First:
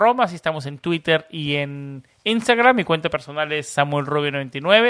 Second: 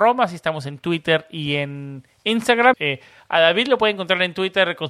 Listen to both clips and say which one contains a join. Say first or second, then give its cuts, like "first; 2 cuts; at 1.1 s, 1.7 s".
second; 1 cut; at 2.7 s